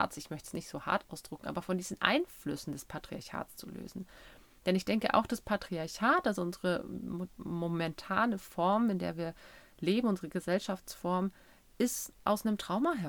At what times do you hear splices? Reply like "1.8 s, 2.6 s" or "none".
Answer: none